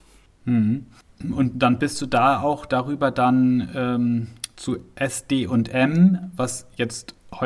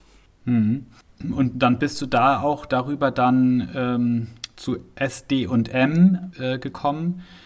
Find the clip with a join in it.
second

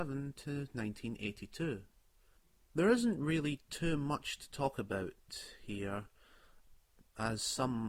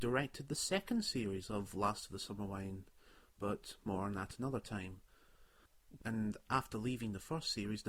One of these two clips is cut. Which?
second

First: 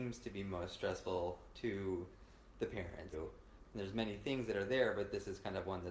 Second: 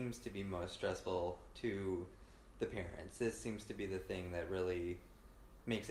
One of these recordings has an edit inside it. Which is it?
first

